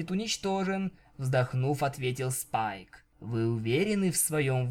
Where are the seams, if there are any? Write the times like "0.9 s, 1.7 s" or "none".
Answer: 3.1 s